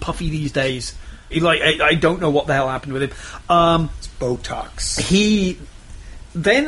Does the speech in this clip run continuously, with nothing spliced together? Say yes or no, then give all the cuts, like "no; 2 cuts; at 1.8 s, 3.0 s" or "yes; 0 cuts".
no; 1 cut; at 1.3 s